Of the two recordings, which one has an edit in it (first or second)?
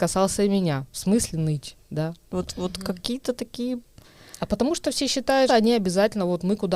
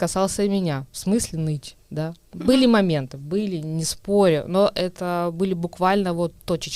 first